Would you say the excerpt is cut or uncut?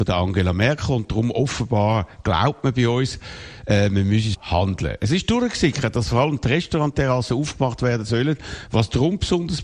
cut